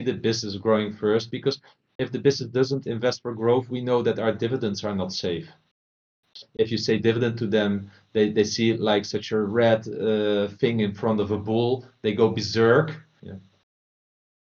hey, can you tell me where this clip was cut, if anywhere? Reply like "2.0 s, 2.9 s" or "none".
6.4 s, 13.2 s